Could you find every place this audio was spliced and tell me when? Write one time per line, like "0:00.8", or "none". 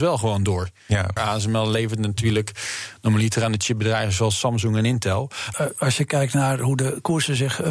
0:01.2
0:05.5